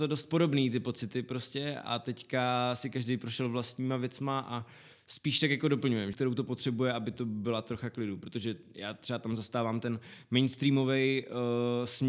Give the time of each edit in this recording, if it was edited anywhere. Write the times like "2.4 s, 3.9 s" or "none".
6.1 s